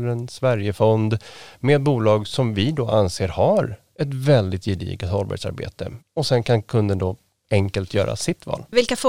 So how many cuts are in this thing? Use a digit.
1